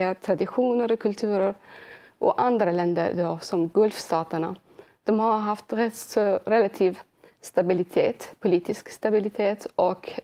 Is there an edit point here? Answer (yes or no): yes